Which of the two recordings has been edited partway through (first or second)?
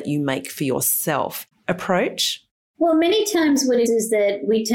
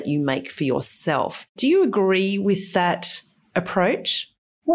first